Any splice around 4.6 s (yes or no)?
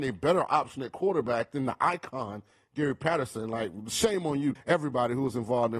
yes